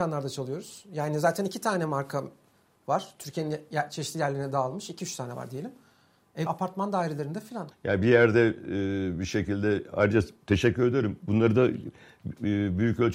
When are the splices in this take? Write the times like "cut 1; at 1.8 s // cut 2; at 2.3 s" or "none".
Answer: cut 1; at 6.5 s // cut 2; at 7.7 s